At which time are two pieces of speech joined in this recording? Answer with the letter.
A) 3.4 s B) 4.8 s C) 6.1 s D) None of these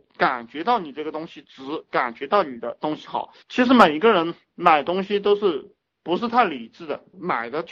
A